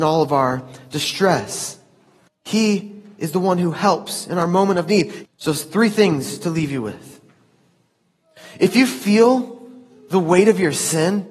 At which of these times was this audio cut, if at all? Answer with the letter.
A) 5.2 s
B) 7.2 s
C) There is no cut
A